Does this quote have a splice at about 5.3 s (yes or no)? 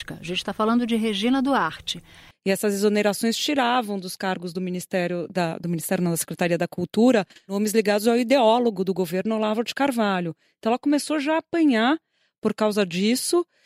no